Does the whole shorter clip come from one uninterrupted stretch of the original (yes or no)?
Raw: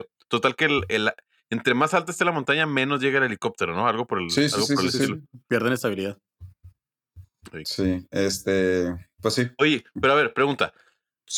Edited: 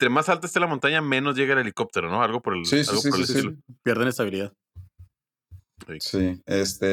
yes